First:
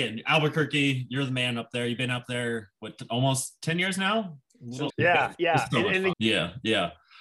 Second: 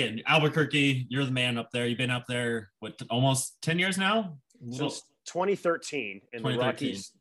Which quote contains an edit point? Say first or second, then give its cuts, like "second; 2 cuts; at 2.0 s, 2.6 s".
first; 2 cuts; at 4.9 s, 6.1 s